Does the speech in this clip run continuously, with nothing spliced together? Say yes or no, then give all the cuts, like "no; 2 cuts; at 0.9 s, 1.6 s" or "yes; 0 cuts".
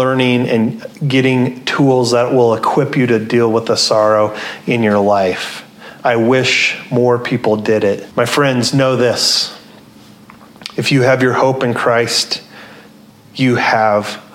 no; 1 cut; at 8.1 s